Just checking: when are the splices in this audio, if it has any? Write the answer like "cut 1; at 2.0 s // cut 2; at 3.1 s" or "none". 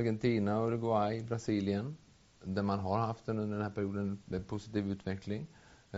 none